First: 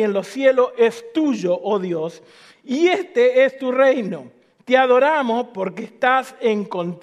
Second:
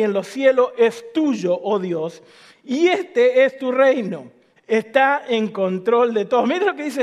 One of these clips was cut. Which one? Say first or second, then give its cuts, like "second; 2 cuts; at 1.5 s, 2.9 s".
second; 1 cut; at 4.6 s